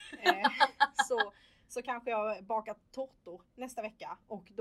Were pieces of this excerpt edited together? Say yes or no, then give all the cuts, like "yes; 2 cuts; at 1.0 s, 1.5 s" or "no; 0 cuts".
no; 0 cuts